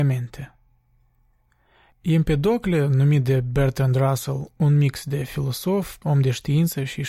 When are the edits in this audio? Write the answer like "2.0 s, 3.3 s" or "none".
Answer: 6.0 s